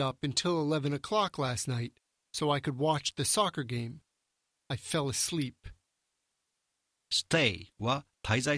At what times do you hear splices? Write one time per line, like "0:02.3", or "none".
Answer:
0:04.5
0:06.9